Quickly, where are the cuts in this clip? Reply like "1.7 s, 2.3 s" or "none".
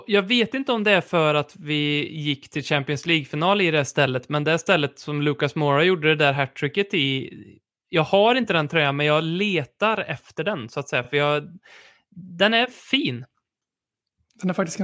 none

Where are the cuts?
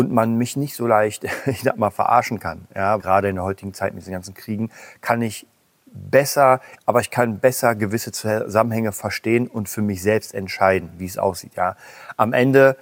3.0 s, 6.8 s

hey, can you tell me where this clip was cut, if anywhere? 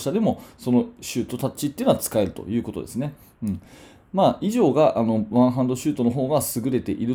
none

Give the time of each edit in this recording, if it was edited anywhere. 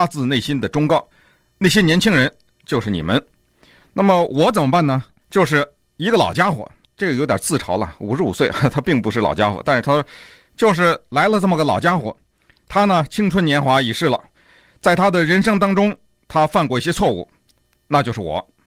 5.2 s

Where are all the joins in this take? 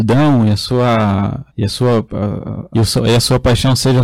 1.5 s, 2.7 s

